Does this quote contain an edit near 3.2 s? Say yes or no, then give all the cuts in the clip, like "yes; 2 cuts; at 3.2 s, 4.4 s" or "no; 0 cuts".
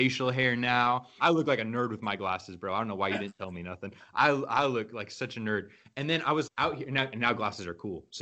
no; 2 cuts; at 1.2 s, 6.5 s